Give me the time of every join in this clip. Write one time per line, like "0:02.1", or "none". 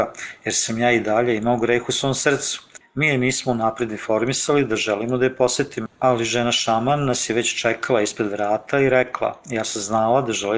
0:02.8